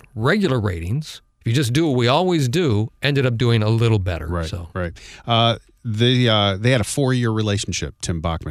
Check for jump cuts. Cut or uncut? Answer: uncut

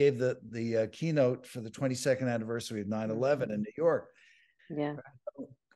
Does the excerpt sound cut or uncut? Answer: cut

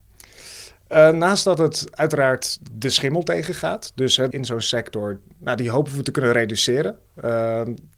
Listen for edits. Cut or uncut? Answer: cut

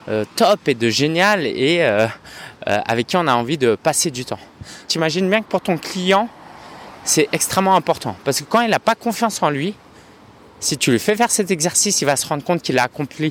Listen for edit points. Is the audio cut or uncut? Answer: cut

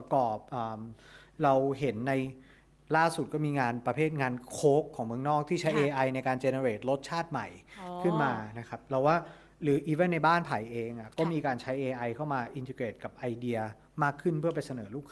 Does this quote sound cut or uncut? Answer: uncut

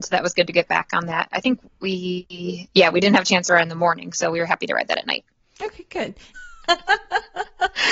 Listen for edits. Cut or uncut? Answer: cut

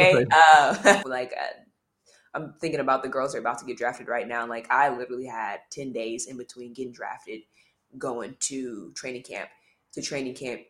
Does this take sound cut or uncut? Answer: cut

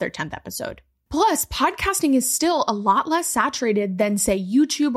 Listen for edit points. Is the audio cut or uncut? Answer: uncut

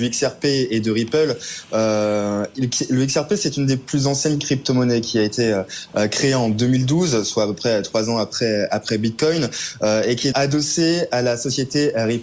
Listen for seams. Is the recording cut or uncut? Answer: cut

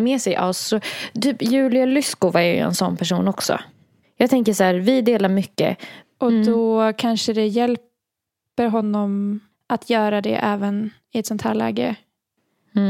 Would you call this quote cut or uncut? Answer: cut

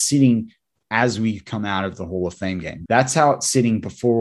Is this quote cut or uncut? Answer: cut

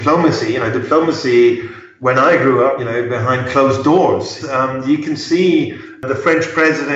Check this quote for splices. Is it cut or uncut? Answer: cut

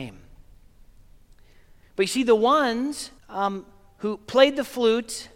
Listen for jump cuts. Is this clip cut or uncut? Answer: cut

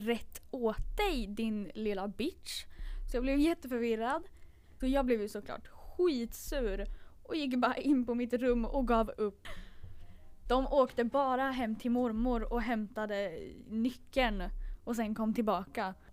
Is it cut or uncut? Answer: cut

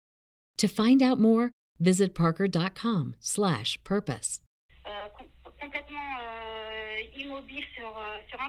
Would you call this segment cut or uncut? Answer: cut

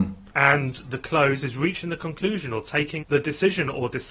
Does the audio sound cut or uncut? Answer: cut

